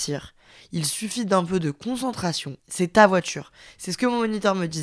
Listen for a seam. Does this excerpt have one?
yes; 1 cut; at 2.6 s

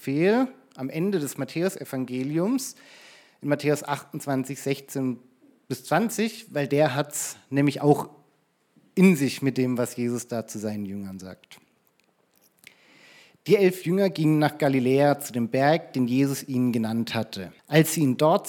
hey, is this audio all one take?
no; 1 cut; at 17.6 s

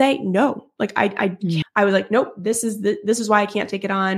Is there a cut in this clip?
yes; 1 cut; at 1.6 s

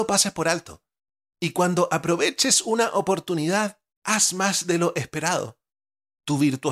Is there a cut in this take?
no; 0 cuts

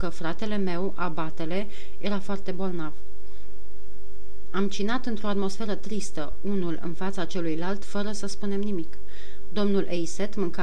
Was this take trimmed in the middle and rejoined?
no; 0 cuts

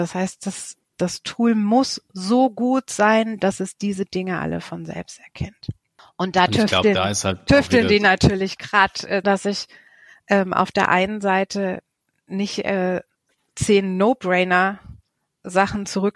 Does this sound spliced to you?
yes; 1 cut; at 9.2 s

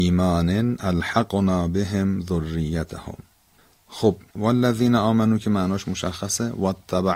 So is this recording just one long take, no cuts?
no; 1 cut; at 4.3 s

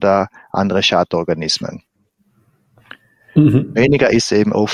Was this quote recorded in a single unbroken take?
yes; 0 cuts

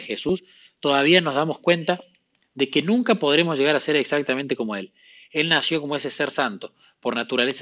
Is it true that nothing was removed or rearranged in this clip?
yes; 0 cuts

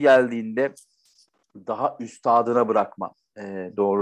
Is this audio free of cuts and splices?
yes; 0 cuts

